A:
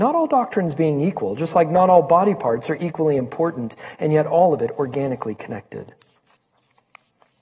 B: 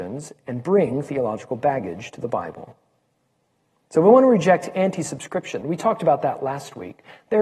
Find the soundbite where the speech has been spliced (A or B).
B